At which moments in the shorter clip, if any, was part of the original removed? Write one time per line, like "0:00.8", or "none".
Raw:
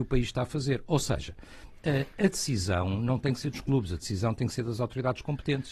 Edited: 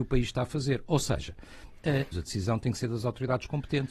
0:02.1